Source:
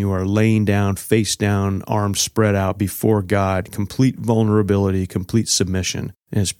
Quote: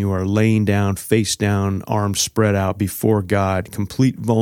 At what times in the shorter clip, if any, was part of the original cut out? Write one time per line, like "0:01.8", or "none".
none